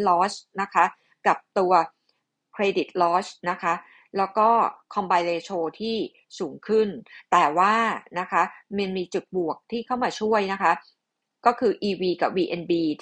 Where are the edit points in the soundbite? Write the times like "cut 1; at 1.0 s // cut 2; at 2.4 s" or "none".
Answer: cut 1; at 3.4 s